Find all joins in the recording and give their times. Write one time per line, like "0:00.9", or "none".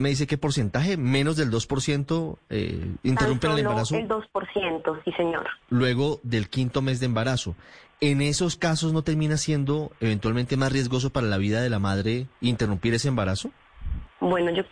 0:05.6